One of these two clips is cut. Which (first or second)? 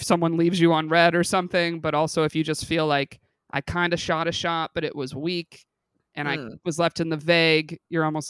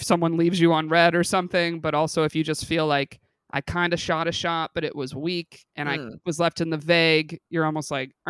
second